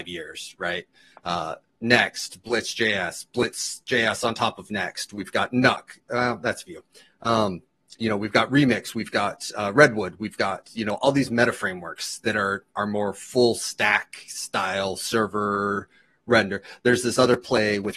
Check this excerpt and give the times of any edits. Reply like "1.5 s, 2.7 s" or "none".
none